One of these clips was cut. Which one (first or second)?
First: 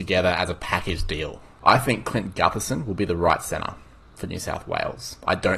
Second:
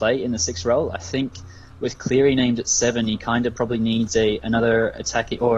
first